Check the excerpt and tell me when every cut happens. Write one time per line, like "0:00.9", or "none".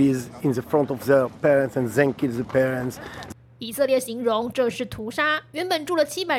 0:03.3